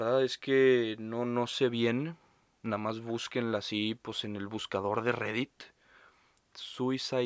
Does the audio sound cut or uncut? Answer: uncut